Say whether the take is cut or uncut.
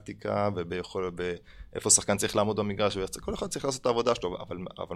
uncut